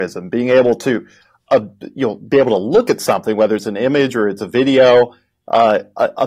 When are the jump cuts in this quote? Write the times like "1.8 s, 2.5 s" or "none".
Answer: none